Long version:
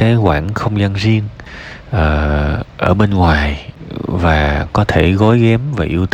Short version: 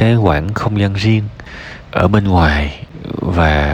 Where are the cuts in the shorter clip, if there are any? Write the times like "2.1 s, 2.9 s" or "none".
1.8 s